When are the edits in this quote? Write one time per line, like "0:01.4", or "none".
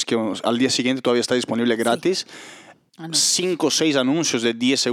0:02.9